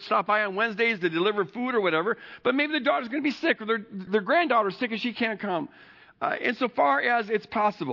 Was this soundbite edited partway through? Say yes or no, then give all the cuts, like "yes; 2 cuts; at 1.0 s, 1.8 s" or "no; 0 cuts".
yes; 1 cut; at 4.1 s